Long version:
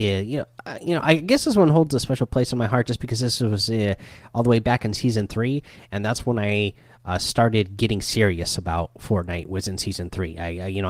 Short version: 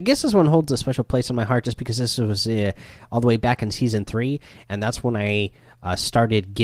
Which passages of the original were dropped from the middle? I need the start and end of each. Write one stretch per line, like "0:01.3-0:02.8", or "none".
none